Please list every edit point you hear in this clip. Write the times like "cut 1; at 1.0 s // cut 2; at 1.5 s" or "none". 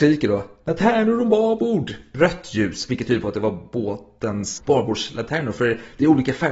cut 1; at 2.1 s // cut 2; at 4.6 s